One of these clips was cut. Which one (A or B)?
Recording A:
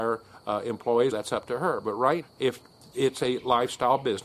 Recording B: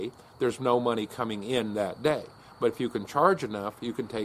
A